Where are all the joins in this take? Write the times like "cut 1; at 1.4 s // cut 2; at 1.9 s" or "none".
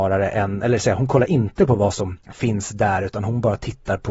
cut 1; at 2.2 s